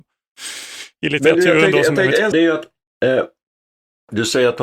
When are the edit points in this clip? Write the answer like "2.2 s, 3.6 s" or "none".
2.3 s

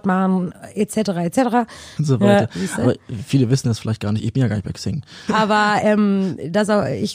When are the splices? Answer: 2.0 s, 5.3 s

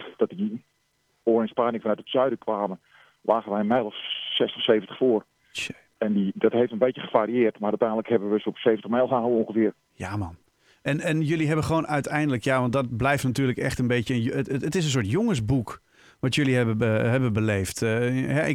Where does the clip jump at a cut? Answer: none

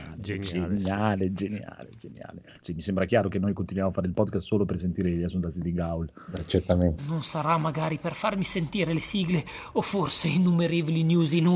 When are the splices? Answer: 7.0 s

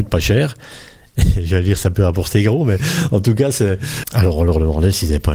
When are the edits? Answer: 4.0 s

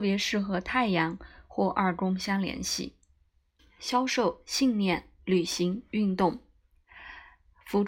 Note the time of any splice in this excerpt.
3.6 s

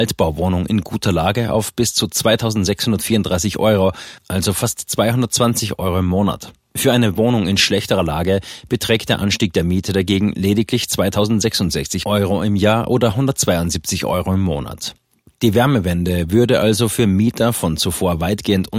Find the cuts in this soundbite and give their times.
none

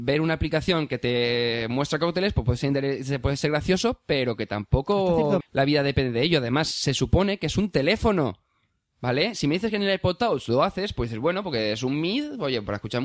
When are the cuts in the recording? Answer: 5.4 s

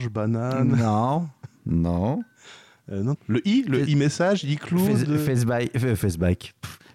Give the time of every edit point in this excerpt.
3.2 s

